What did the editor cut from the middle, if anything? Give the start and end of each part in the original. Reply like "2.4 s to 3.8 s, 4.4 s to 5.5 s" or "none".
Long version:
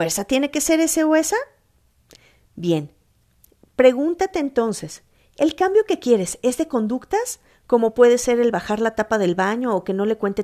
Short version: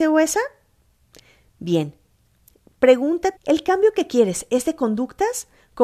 4.3 s to 5.3 s